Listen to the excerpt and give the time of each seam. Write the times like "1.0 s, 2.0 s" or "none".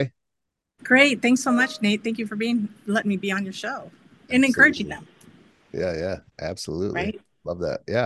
4.3 s